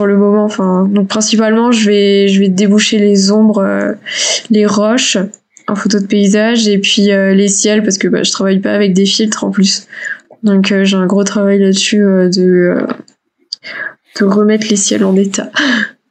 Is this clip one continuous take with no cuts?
yes; 0 cuts

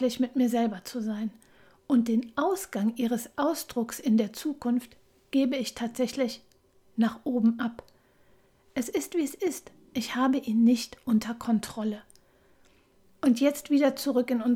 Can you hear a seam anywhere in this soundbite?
no; 0 cuts

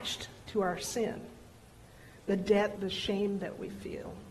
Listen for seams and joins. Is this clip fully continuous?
no; 1 cut; at 2.8 s

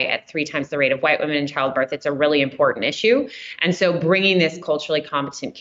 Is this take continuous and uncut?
yes; 0 cuts

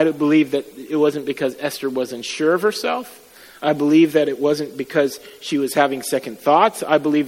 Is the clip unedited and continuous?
yes; 0 cuts

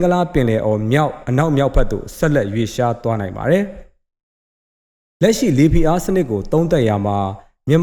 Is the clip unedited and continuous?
yes; 0 cuts

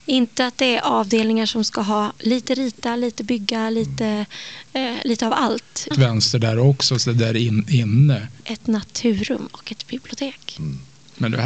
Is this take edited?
yes; 3 cuts; at 2.2 s, 5.9 s, 8.4 s

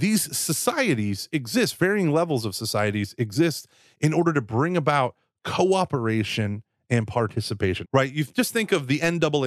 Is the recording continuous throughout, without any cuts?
no; 1 cut; at 7.8 s

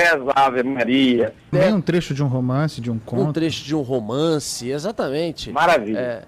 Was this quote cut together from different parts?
yes; 1 cut; at 1.5 s

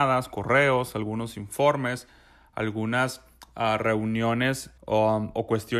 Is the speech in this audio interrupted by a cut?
yes; 1 cut; at 4.8 s

